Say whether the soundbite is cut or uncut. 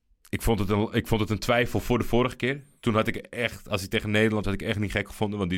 cut